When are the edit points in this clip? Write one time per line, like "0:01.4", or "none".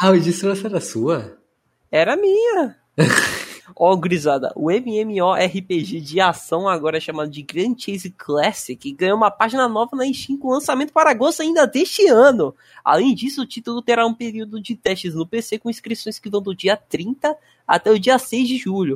0:03.6